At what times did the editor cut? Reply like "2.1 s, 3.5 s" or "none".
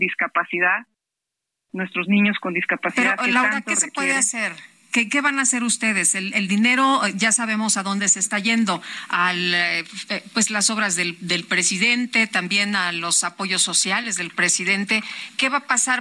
none